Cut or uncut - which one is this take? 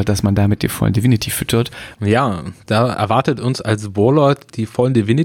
cut